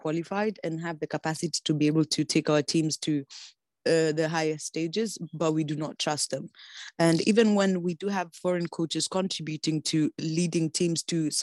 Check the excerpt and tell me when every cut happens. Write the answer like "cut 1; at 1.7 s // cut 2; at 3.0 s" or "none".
none